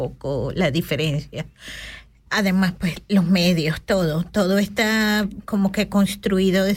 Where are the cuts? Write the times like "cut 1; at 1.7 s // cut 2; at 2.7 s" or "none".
cut 1; at 2.3 s